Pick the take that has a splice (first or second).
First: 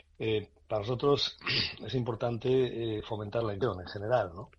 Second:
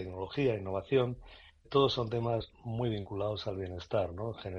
second